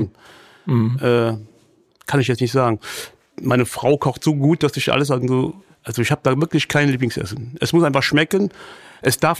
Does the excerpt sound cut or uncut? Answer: uncut